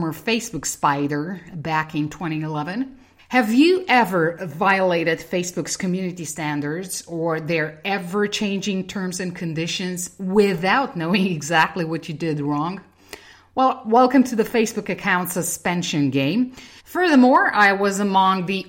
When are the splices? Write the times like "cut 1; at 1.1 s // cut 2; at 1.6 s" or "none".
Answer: cut 1; at 3.2 s // cut 2; at 16.8 s